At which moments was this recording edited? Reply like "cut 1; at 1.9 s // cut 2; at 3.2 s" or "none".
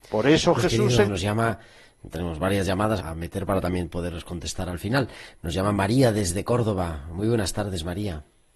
cut 1; at 1.1 s // cut 2; at 3.0 s